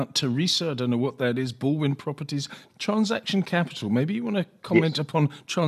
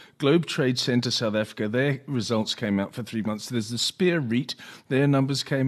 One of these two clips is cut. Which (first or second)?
first